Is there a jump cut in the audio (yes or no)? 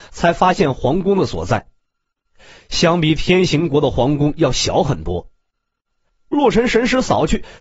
yes